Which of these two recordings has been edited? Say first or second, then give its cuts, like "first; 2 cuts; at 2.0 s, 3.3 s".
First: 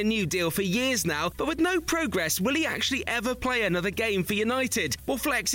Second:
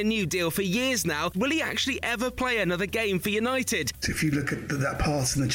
second; 2 cuts; at 1.3 s, 4.0 s